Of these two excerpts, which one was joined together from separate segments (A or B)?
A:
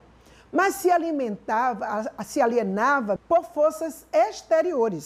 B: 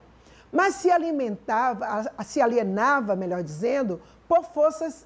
A